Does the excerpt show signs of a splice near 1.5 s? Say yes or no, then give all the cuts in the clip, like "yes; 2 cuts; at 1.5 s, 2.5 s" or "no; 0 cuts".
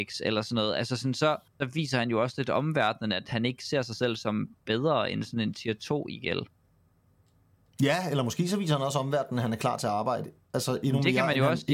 yes; 1 cut; at 1.5 s